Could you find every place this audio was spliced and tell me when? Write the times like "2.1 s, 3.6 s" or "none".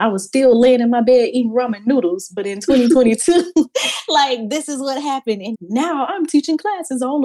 5.5 s